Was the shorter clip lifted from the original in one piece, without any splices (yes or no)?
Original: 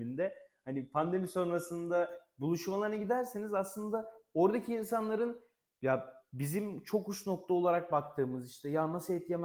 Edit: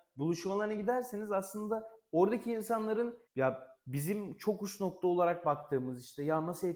no